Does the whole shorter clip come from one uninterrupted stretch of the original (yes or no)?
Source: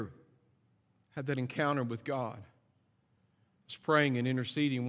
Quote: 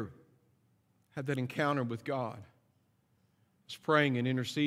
yes